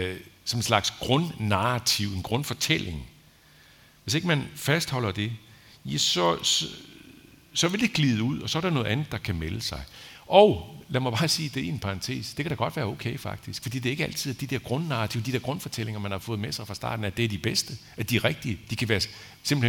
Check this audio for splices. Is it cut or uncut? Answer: uncut